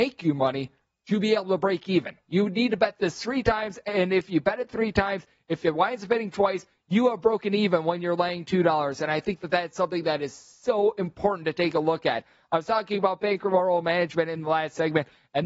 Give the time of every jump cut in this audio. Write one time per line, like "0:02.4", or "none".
none